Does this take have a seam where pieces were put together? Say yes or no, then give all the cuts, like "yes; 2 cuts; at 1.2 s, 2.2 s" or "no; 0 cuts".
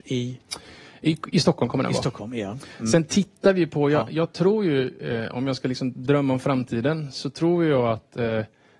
no; 0 cuts